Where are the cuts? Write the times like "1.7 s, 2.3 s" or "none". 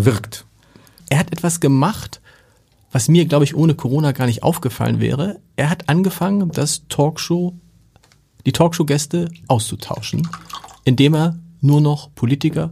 1.0 s